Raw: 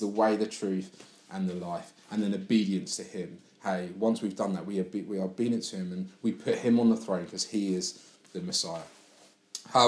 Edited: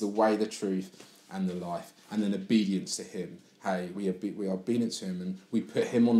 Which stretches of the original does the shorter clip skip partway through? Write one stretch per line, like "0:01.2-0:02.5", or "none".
0:03.9-0:04.6

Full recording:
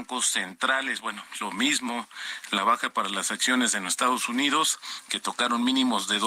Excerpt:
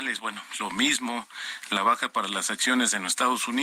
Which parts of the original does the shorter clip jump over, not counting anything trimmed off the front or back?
none

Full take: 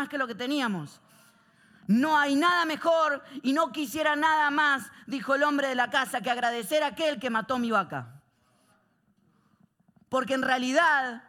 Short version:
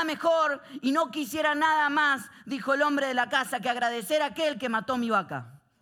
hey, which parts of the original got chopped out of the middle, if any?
none

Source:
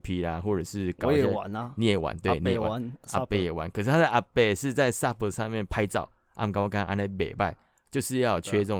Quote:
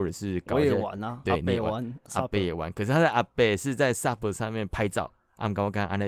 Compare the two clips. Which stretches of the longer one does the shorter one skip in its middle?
0:01.7-0:02.2

